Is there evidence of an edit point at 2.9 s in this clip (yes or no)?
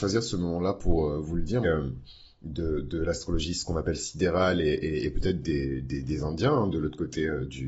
no